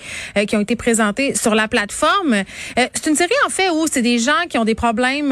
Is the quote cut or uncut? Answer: uncut